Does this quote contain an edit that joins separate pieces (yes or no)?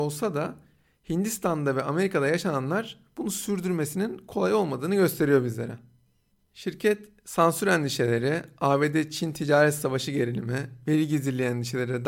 no